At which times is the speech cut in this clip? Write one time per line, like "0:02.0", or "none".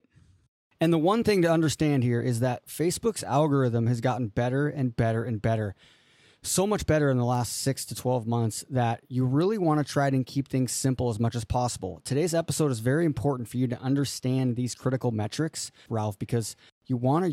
0:15.9

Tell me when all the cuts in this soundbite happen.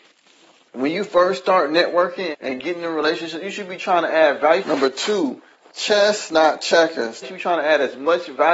0:02.3
0:04.6
0:07.2

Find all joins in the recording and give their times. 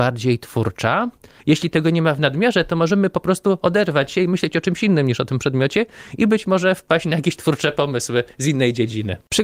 0:01.4

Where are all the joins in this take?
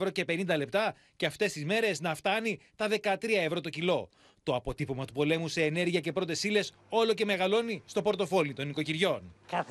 none

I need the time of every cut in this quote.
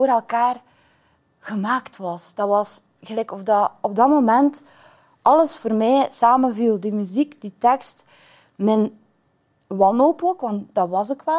none

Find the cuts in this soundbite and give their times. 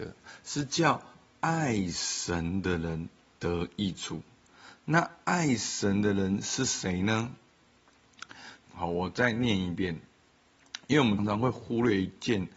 0:08.6
0:11.2

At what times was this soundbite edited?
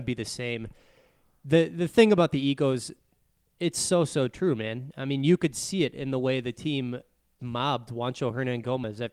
0:07.4

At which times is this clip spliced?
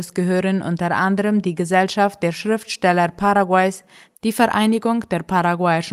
none

